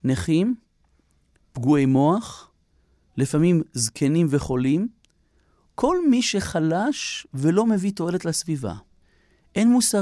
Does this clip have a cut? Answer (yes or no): no